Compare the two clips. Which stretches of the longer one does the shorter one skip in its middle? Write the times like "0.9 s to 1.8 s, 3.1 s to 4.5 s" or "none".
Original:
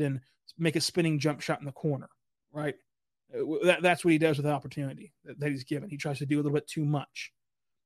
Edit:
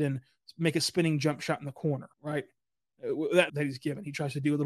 2.1 s to 2.4 s, 3.8 s to 5.3 s